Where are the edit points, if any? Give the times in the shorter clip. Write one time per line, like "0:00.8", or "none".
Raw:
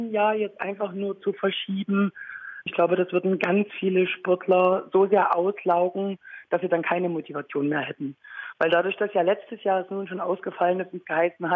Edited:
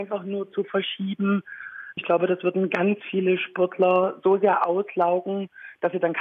none